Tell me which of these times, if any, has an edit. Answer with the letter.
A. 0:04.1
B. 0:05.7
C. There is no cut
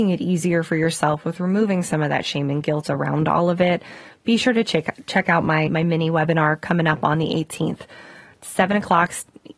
B